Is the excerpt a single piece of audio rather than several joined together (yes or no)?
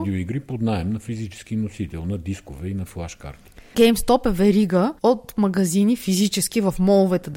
no